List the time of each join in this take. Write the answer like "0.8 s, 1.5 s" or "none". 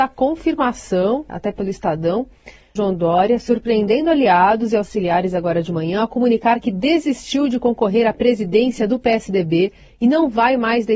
1.3 s, 2.8 s